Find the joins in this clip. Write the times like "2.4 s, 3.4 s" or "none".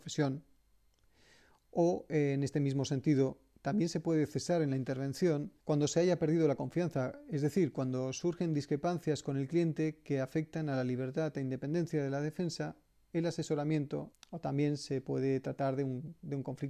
5.6 s, 14.1 s